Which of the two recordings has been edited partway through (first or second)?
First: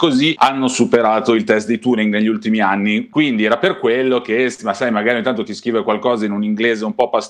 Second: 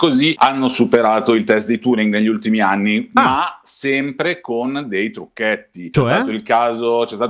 first